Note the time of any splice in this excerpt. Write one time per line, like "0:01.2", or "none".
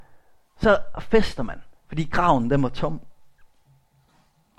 0:01.8